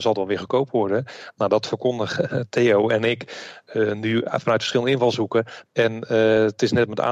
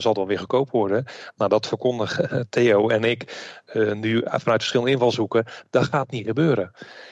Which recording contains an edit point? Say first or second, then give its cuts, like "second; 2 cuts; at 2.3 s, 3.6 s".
first; 1 cut; at 5.7 s